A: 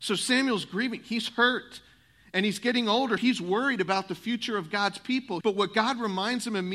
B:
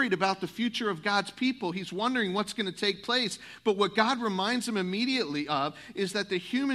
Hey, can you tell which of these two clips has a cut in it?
A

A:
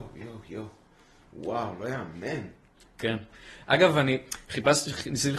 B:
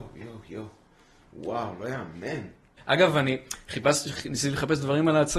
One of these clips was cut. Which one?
B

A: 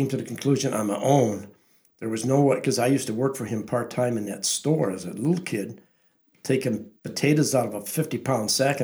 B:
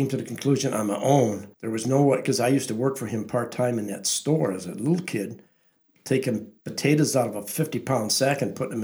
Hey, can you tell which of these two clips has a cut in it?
B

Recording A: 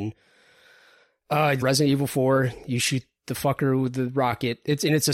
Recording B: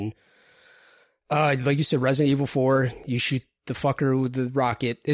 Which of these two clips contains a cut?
A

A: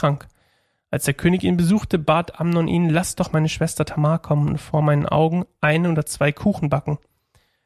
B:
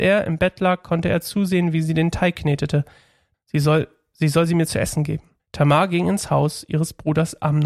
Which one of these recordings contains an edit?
B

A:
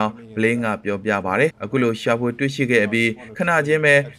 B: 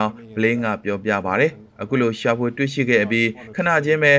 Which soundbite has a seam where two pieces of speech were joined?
A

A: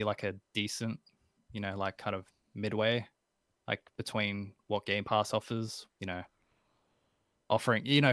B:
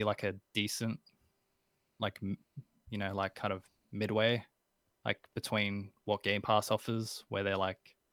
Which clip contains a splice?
A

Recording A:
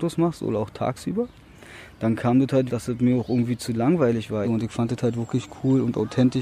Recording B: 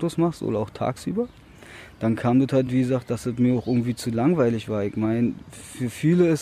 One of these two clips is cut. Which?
A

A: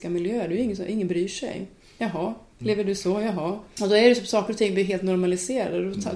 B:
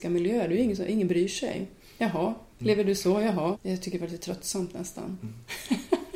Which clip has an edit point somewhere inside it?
B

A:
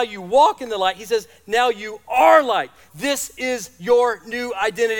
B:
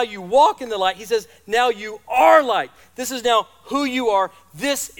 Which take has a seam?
A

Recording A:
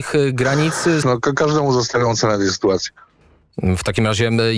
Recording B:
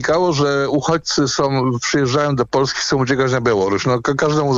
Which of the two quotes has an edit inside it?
A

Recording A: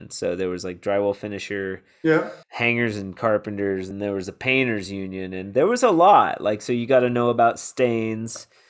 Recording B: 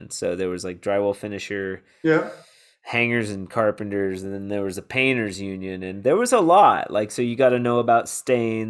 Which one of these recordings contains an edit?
A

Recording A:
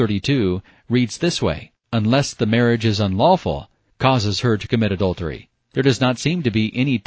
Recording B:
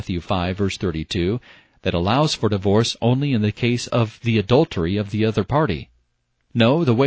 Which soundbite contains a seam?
A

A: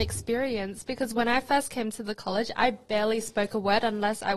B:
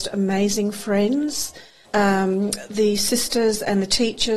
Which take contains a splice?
B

